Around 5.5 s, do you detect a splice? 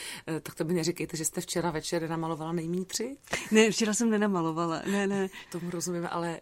yes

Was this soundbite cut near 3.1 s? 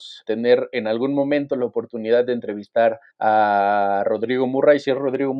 yes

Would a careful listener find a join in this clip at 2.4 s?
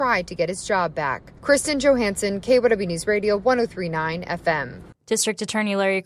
no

